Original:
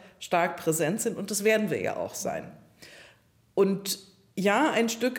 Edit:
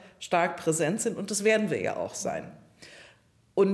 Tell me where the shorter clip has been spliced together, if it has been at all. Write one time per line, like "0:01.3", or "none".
none